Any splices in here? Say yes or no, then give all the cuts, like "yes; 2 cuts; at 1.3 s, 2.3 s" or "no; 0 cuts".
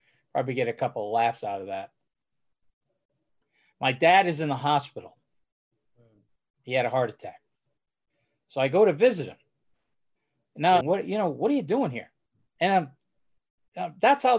yes; 1 cut; at 10.8 s